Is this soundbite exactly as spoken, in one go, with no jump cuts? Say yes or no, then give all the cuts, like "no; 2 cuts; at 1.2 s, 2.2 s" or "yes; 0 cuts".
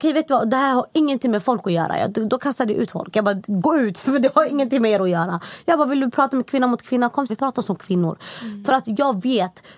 no; 1 cut; at 7.3 s